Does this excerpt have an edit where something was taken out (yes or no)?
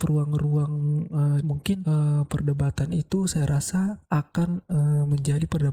yes